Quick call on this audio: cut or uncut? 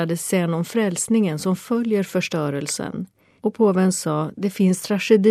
cut